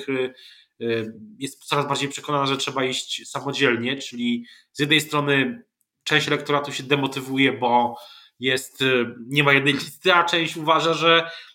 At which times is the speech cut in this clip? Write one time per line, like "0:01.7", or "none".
none